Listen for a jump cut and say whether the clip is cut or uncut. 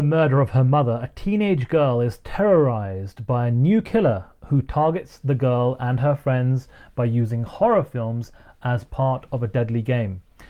uncut